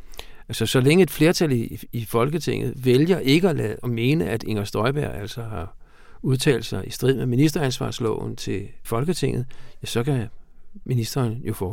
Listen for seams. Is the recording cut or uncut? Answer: cut